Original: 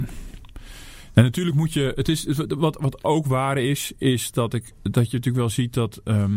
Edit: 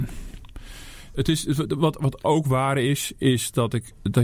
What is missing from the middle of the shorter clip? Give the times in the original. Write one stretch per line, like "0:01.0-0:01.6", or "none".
0:01.1-0:01.9